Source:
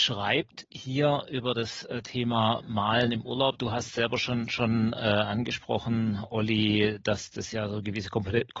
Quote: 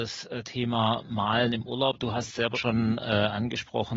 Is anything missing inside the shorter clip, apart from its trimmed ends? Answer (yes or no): yes